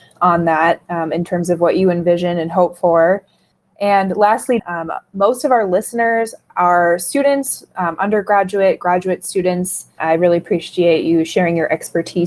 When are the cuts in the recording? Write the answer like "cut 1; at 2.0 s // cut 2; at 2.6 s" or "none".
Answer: cut 1; at 4.6 s // cut 2; at 10.0 s